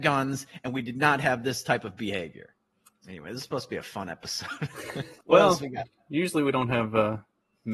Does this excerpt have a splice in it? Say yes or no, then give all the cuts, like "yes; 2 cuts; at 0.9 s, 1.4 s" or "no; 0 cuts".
yes; 2 cuts; at 2.9 s, 5.2 s